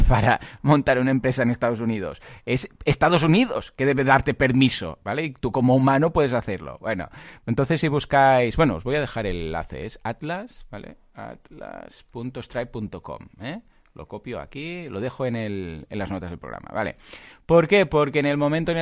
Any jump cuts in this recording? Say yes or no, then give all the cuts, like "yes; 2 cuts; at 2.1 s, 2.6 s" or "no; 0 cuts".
no; 0 cuts